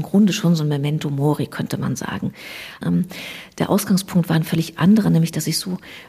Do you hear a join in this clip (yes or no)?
yes